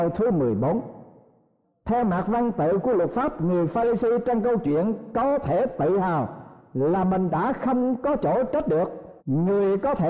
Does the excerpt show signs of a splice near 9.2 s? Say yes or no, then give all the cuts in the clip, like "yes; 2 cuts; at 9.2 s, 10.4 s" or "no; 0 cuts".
yes; 1 cut; at 9.2 s